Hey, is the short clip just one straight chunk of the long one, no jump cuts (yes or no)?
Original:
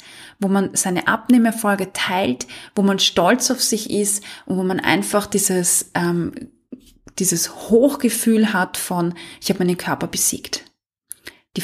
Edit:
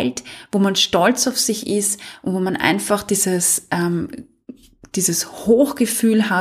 yes